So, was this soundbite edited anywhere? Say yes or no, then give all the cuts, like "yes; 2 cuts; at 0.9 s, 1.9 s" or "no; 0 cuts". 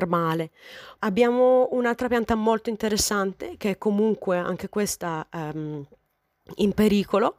yes; 1 cut; at 1.0 s